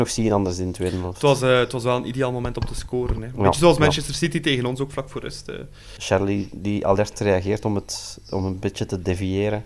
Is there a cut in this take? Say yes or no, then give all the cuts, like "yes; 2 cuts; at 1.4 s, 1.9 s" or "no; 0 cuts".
yes; 1 cut; at 6.0 s